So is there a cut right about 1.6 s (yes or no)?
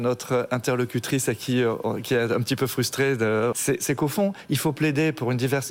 no